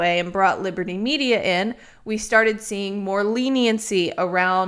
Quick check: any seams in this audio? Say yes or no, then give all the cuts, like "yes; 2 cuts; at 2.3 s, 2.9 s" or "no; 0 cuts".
no; 0 cuts